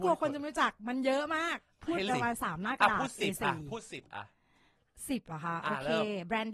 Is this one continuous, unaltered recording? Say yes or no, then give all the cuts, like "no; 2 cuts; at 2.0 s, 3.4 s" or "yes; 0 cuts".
no; 1 cut; at 2.1 s